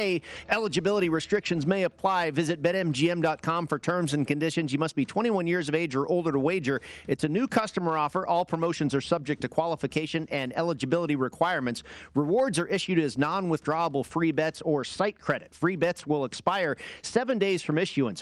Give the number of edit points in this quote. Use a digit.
0